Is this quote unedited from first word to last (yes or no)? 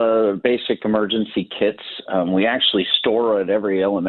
yes